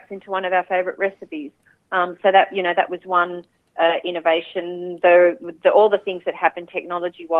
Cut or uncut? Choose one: uncut